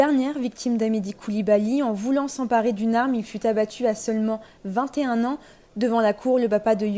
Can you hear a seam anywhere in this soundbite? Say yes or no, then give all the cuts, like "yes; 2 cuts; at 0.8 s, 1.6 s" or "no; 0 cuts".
no; 0 cuts